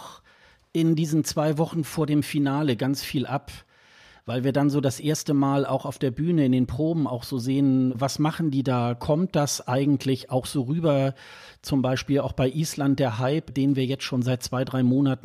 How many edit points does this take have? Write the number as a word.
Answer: zero